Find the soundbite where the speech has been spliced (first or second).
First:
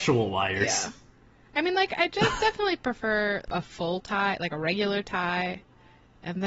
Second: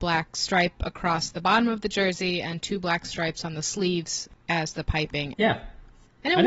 second